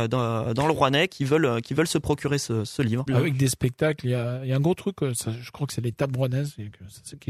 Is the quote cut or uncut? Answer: cut